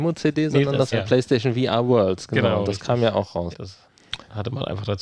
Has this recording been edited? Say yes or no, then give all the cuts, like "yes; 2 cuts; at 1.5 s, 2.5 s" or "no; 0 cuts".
yes; 2 cuts; at 0.9 s, 3.5 s